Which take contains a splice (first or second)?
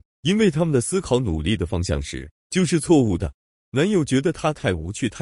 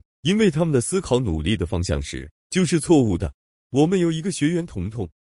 first